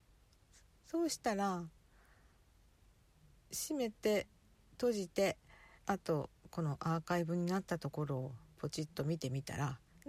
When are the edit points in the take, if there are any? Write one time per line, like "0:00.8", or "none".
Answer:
0:05.8